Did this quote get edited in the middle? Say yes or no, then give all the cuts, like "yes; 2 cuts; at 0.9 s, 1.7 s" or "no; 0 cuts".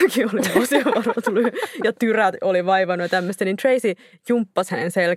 no; 0 cuts